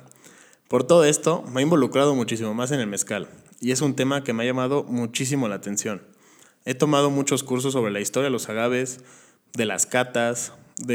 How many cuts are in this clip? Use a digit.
0